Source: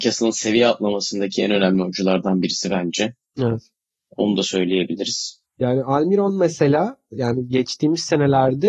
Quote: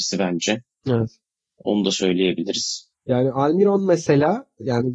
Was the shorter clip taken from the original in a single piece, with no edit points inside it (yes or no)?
yes